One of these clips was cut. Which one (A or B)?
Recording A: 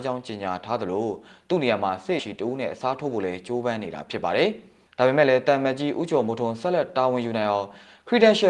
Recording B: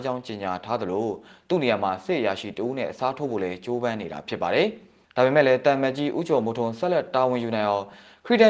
A